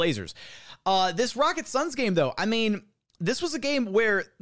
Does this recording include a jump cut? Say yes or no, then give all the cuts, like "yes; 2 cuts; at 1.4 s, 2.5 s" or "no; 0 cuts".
no; 0 cuts